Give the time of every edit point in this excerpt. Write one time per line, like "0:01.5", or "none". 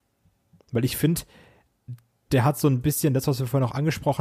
none